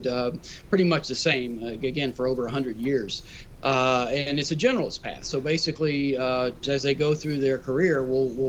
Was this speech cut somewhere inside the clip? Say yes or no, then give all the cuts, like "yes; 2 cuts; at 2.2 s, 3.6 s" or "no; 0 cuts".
yes; 1 cut; at 6.6 s